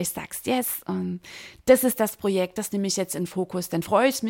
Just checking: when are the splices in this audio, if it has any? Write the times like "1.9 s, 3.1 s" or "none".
none